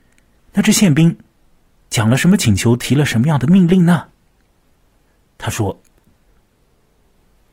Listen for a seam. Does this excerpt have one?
no; 0 cuts

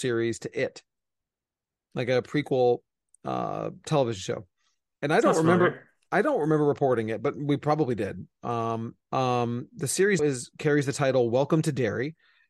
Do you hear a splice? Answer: yes; 2 cuts; at 9.0 s, 10.2 s

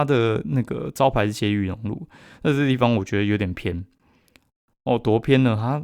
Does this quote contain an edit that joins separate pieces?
no; 0 cuts

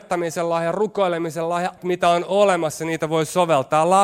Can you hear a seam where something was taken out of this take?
yes; 1 cut; at 1.8 s

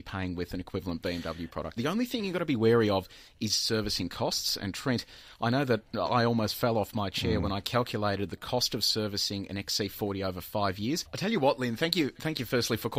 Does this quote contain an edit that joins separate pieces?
yes; 2 cuts; at 1.8 s, 11.1 s

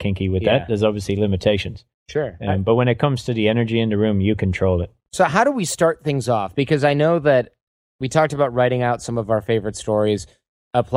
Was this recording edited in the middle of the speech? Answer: no; 0 cuts

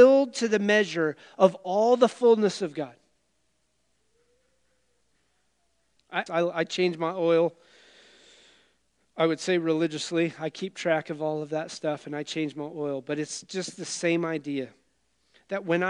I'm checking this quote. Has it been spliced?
yes; 1 cut; at 6.3 s

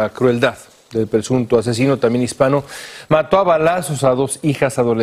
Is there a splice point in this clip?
no; 0 cuts

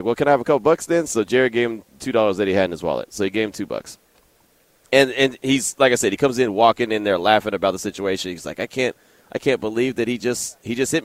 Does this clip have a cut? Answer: no; 0 cuts

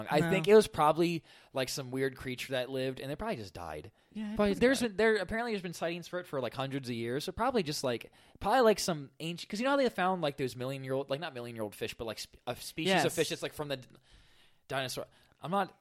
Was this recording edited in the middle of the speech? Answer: yes; 1 cut; at 4.6 s

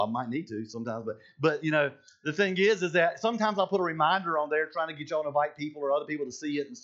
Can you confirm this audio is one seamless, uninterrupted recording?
yes; 0 cuts

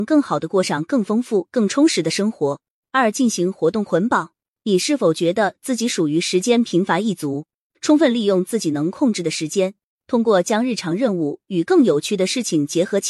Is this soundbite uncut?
no; 1 cut; at 7.7 s

